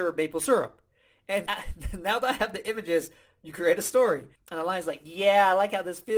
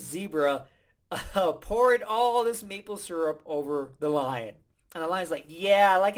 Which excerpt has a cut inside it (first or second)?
first